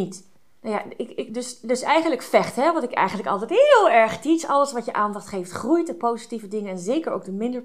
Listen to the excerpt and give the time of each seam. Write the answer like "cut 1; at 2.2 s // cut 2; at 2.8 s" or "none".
none